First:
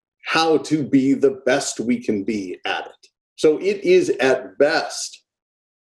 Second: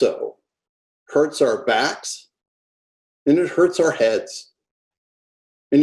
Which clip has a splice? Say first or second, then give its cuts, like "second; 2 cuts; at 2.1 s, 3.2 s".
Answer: first; 1 cut; at 3.3 s